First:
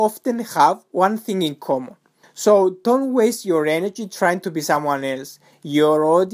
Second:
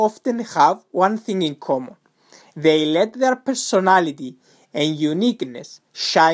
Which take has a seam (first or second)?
first